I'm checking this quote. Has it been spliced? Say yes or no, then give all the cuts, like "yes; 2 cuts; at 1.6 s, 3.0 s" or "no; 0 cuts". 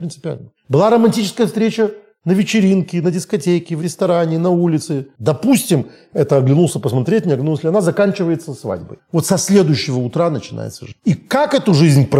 yes; 1 cut; at 5.2 s